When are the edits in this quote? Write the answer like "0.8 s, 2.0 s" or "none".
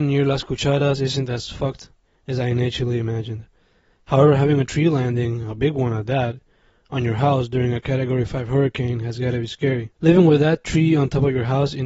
9.9 s